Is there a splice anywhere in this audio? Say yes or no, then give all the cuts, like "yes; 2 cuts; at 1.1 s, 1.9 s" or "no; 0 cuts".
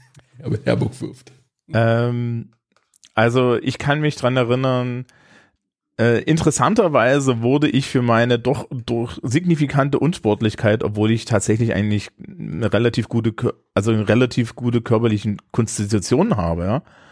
no; 0 cuts